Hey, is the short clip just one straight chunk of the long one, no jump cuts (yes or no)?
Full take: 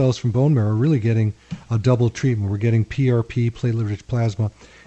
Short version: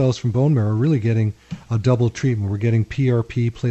yes